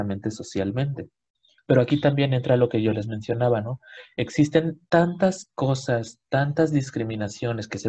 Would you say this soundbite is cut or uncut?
cut